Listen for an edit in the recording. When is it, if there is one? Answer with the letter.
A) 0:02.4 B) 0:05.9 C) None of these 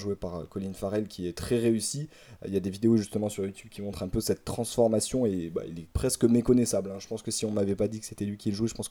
B